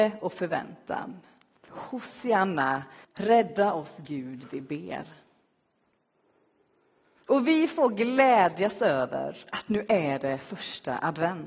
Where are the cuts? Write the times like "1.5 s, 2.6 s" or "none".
3.0 s